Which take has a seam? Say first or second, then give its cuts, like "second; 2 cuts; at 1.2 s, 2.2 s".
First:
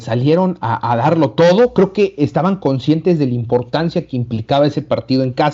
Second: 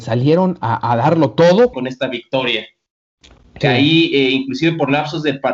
second; 2 cuts; at 1.7 s, 3.6 s